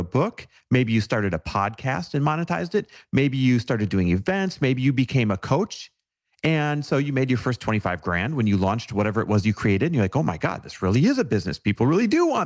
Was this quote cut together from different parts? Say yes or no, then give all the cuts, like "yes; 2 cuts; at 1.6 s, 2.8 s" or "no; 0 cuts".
no; 0 cuts